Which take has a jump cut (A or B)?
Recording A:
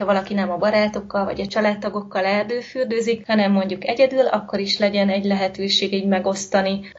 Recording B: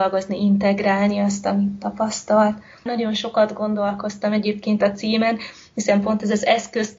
B